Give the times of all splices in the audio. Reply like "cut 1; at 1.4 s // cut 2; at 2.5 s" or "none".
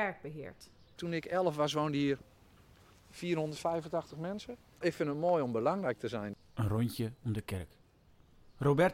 cut 1; at 1.0 s // cut 2; at 4.8 s